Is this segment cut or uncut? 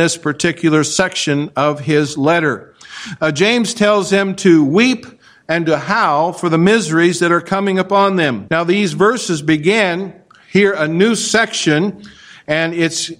cut